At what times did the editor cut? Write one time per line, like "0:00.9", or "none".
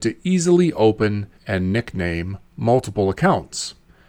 0:01.4
0:02.5